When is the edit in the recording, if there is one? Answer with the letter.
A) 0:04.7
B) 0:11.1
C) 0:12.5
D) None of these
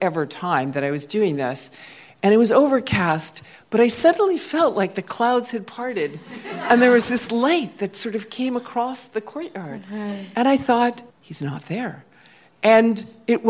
B